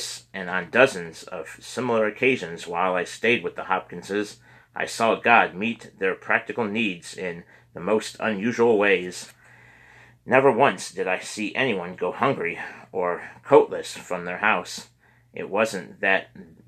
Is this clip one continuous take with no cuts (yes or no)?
yes